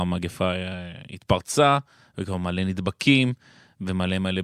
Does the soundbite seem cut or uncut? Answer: uncut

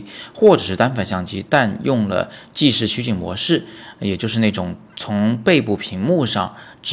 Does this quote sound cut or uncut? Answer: uncut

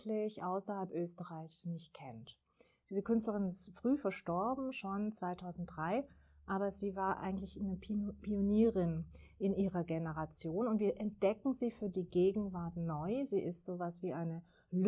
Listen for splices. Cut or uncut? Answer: uncut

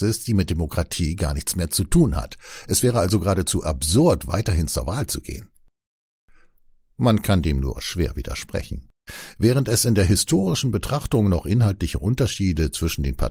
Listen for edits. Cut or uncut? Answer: uncut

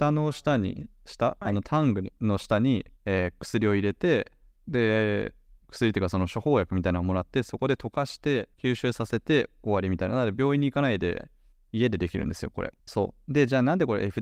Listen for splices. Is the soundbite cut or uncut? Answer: cut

